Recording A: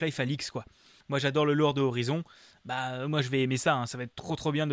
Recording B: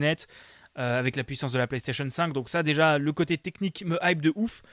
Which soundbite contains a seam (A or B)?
A